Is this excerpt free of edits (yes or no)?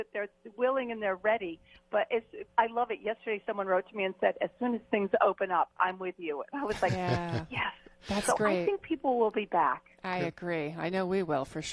yes